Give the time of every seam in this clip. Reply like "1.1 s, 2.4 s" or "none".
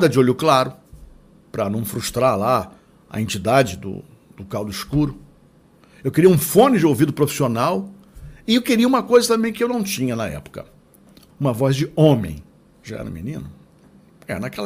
11.3 s, 12.7 s